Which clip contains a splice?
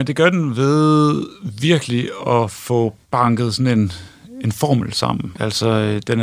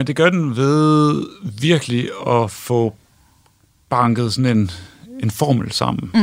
first; 2 cuts; at 3.0 s, 5.3 s

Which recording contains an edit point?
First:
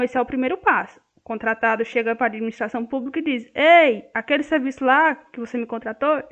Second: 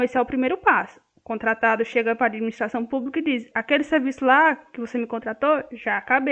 second; 1 cut; at 3.5 s

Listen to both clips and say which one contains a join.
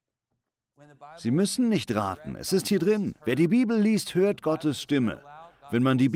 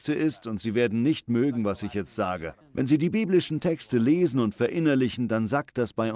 second; 1 cut; at 2.6 s

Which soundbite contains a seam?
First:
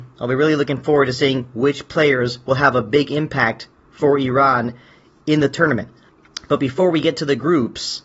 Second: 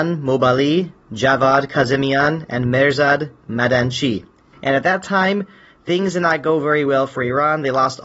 second; 1 cut; at 4.5 s

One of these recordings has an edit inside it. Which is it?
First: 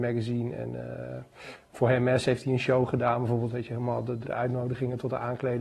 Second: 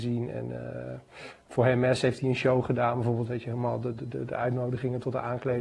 first; 1 cut; at 4.2 s

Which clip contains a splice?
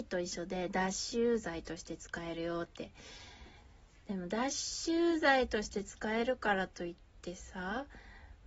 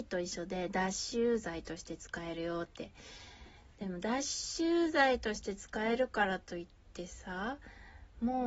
second; 1 cut; at 3.7 s

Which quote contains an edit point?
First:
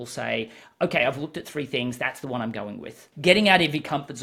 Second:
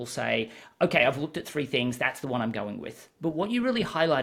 first; 1 cut; at 3.1 s

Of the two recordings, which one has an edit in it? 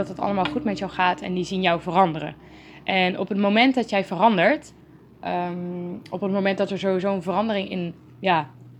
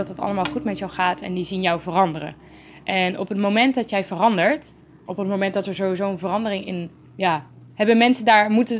second; 2 cuts; at 5.1 s, 7.7 s

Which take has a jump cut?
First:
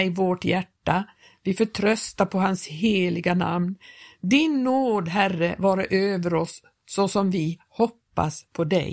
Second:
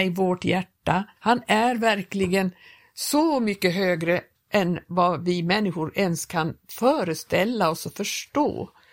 second; 1 cut; at 1.2 s

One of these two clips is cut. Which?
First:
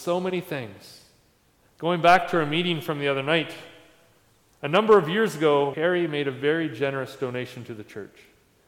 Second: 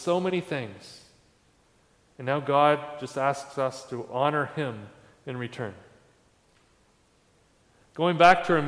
first; 2 cuts; at 1.6 s, 5.7 s

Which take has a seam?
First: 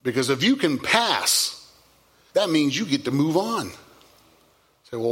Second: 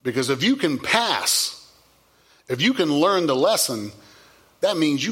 first; 1 cut; at 2.3 s

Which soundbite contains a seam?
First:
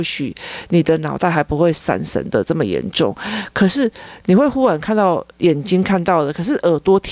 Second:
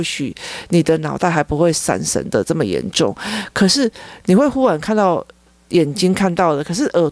first; 1 cut; at 5.3 s

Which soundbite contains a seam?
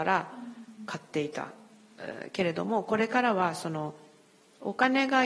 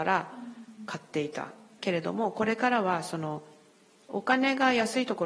second; 1 cut; at 1.8 s

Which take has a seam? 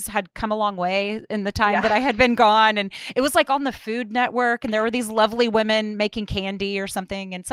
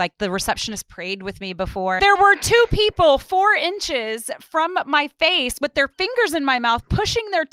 second; 1 cut; at 2.0 s

